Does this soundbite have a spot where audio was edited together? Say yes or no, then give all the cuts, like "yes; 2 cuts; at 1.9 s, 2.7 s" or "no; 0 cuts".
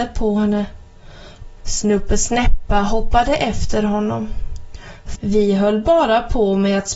yes; 2 cuts; at 1.6 s, 5.1 s